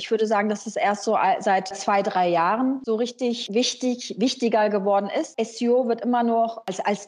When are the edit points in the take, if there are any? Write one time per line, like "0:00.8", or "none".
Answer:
0:01.7